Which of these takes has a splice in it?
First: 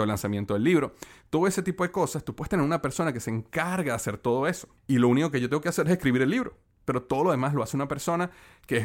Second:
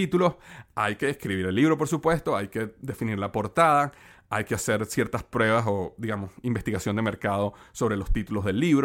first; 1 cut; at 4.8 s

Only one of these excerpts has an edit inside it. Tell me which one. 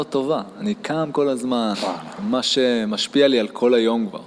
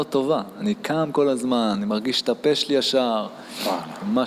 first; 1 cut; at 1.7 s

